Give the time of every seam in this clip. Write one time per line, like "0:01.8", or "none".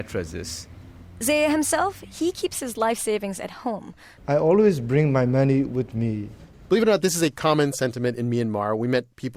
0:04.2

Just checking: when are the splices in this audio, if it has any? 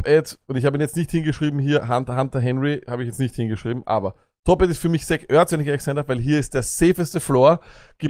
none

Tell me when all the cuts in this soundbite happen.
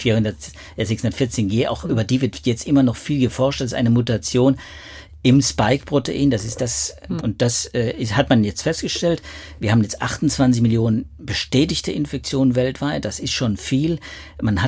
0:07.2

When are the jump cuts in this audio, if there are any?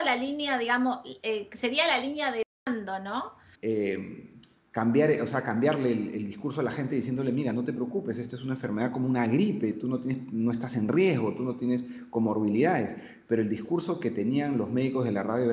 0:03.5

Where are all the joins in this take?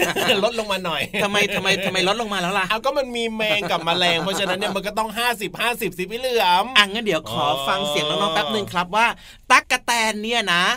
0:09.6

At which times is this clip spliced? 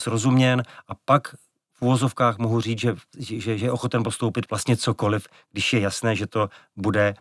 none

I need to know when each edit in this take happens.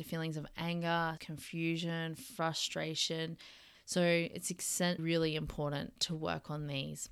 0:01.2
0:03.7
0:05.0

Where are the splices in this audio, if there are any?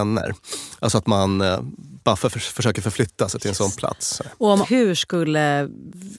0:04.6

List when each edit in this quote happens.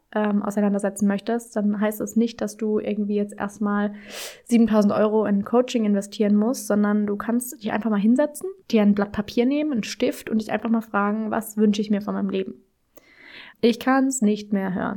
0:08.6
0:13.5

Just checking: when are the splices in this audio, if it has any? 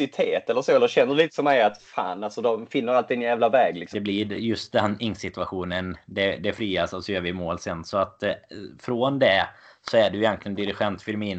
0:03.9

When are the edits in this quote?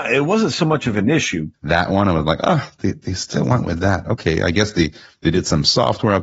0:01.5

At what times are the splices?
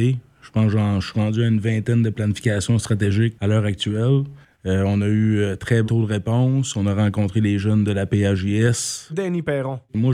0:04.5
0:05.8
0:09.1

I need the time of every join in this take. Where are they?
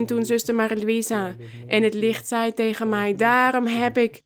none

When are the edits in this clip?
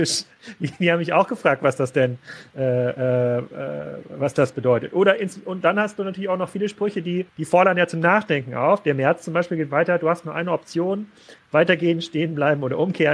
0:07.3

